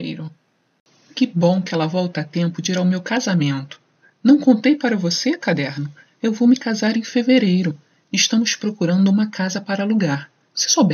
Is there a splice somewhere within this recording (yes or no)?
no